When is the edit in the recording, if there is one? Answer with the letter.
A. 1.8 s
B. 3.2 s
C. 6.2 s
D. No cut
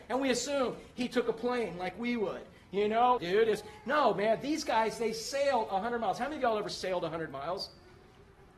B